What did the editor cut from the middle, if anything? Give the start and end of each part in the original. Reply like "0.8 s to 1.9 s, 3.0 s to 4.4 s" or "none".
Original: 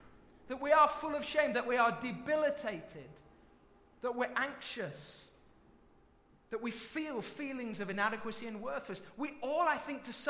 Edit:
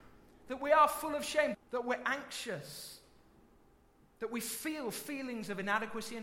1.5 s to 3.8 s